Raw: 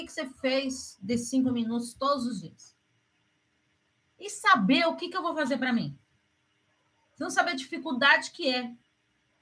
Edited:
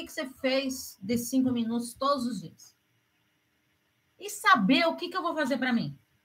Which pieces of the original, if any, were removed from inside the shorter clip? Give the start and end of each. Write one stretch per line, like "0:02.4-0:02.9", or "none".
none